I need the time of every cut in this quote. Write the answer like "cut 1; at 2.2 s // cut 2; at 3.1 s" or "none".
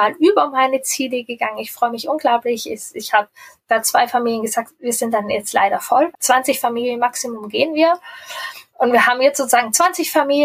cut 1; at 6.1 s